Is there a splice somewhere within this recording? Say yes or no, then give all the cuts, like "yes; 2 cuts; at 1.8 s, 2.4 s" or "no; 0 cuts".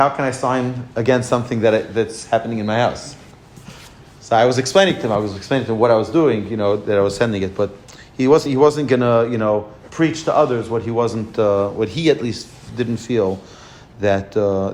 no; 0 cuts